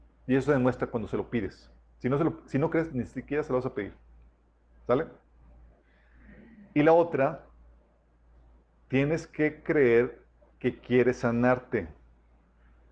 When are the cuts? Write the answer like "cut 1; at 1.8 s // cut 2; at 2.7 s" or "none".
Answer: cut 1; at 2.9 s